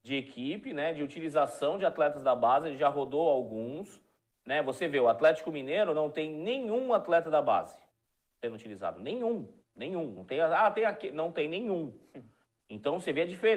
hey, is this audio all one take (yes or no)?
yes